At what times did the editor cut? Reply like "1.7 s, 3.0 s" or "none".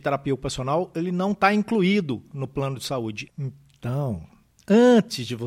3.3 s